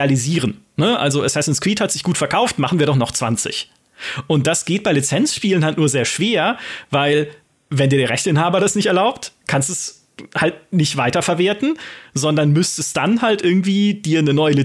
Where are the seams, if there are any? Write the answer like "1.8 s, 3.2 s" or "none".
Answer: none